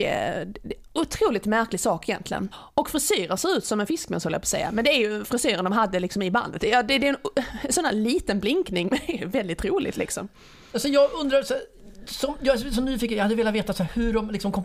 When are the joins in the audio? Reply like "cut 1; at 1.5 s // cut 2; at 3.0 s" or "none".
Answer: cut 1; at 2.5 s